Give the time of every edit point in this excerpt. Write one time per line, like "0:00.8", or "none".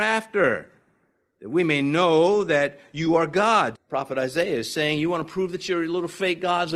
0:03.7